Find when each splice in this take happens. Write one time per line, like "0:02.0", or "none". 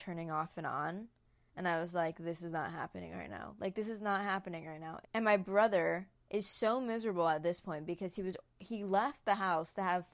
0:05.0
0:06.1